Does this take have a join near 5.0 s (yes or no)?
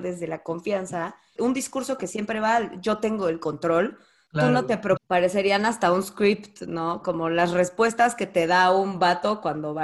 yes